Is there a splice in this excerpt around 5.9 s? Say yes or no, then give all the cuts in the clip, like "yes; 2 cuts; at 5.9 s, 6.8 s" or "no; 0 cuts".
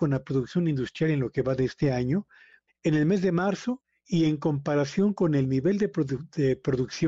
no; 1 cut; at 2.7 s